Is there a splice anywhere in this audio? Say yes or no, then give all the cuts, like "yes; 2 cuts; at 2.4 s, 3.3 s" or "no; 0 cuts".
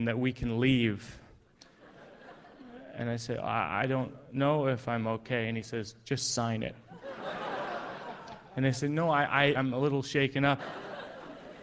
yes; 2 cuts; at 9.5 s, 10.6 s